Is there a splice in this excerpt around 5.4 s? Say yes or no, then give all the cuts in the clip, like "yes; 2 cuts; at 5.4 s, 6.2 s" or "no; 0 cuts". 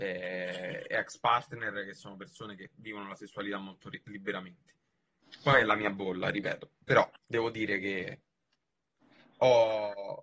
no; 1 cut; at 7.2 s